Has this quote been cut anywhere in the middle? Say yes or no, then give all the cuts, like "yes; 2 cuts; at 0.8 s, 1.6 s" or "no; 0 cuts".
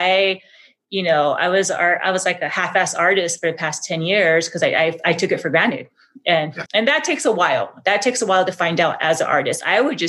yes; 1 cut; at 6.6 s